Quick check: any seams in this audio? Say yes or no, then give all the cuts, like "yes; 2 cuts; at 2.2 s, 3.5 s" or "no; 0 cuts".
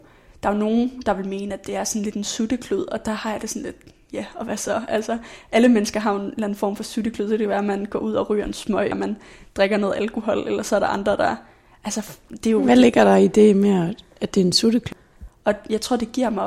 yes; 2 cuts; at 8.9 s, 15.3 s